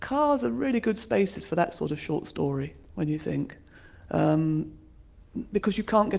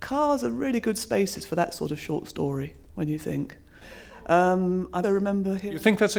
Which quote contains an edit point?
second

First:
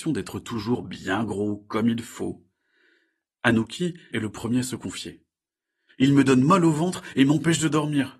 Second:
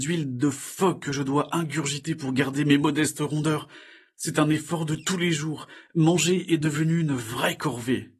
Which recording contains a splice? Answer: first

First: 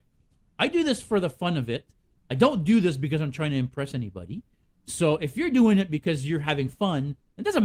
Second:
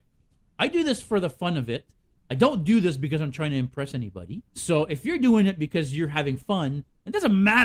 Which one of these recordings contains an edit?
second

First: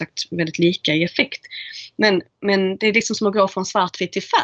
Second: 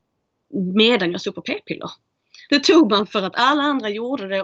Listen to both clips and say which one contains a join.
second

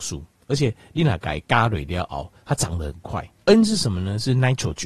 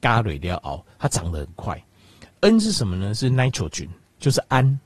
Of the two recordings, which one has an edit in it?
first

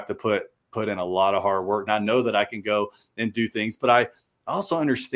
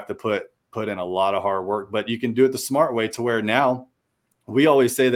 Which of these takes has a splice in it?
first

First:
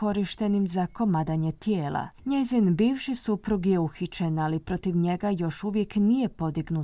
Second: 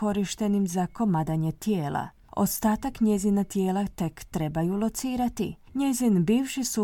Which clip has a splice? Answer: first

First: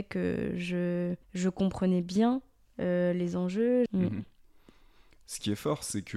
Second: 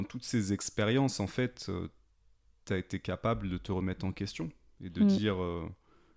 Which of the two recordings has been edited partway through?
first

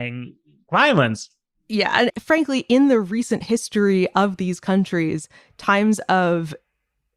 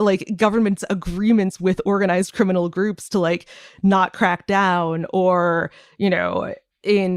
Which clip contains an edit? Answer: first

